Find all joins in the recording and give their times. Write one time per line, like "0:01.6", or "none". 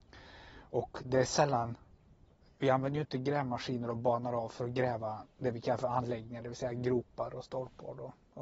none